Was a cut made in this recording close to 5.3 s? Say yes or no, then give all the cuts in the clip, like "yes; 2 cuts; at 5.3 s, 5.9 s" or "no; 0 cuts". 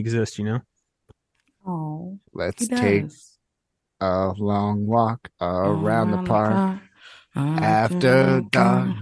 yes; 2 cuts; at 2.3 s, 5.3 s